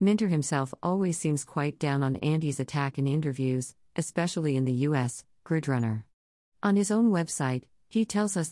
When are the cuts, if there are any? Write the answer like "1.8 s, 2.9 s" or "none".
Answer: 3.9 s